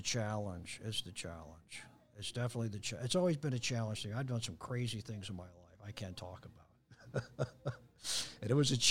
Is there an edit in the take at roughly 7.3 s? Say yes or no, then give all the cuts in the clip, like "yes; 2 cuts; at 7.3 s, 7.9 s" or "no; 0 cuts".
no; 0 cuts